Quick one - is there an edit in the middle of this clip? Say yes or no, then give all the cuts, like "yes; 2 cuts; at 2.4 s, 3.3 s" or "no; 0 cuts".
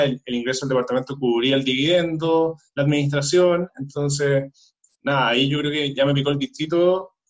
yes; 1 cut; at 4.9 s